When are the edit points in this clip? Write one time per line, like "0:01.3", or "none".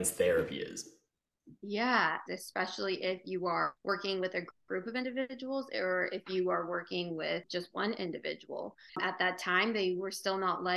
0:02.3
0:08.9